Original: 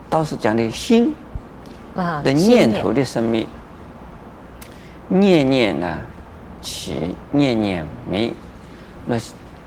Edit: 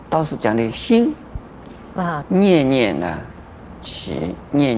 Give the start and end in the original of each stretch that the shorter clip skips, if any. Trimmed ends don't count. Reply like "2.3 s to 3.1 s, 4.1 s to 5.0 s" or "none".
2.2 s to 5.0 s

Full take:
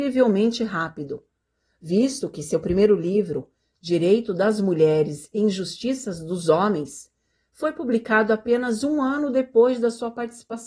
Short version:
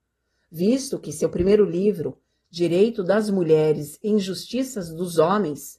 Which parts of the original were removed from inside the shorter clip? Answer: none

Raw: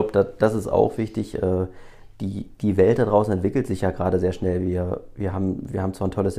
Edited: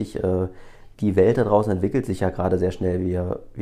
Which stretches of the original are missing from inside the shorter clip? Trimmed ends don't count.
2.1 s to 2.6 s

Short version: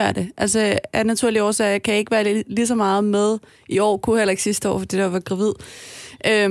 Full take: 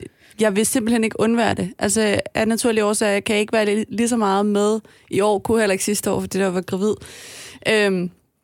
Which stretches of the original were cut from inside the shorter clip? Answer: none

